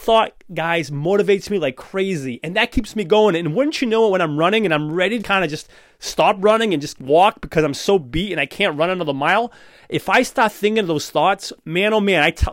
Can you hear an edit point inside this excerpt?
yes; 1 cut; at 5.2 s

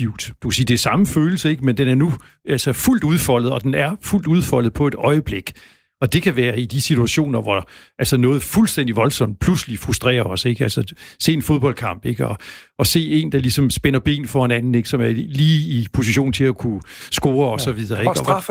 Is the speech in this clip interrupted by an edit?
no; 0 cuts

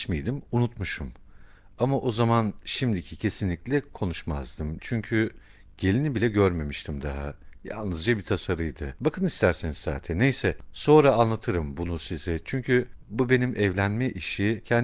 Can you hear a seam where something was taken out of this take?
yes; 1 cut; at 9.0 s

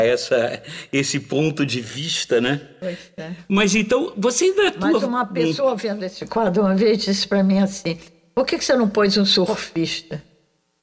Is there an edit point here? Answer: no; 0 cuts

